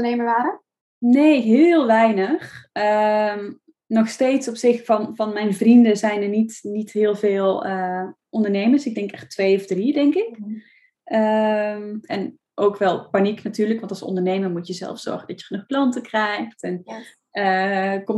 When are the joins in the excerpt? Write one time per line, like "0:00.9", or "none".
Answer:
0:12.1